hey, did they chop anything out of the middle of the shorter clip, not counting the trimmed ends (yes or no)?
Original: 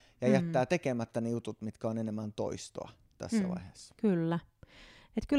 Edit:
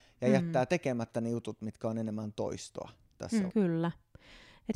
yes